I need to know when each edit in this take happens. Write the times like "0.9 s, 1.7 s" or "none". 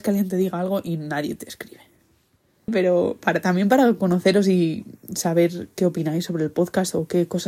2.7 s